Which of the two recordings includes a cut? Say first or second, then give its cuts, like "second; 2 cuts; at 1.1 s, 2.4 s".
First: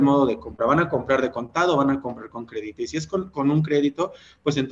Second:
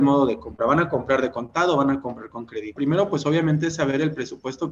second; 1 cut; at 2.8 s